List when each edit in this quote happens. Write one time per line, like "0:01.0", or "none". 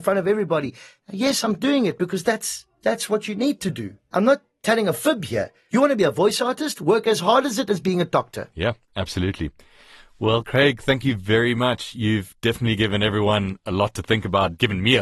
none